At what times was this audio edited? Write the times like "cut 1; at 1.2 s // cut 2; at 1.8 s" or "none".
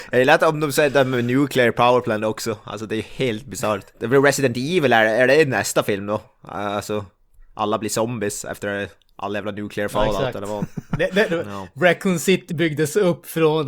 cut 1; at 3.9 s // cut 2; at 11.3 s // cut 3; at 12.5 s